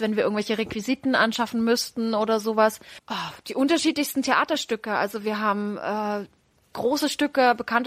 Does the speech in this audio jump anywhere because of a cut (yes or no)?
yes